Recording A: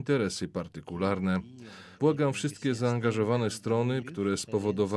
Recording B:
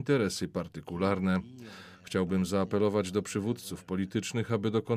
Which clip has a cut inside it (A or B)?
A